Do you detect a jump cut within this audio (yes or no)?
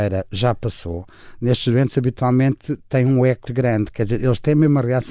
yes